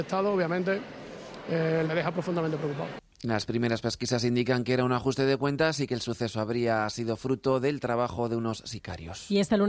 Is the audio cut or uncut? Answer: cut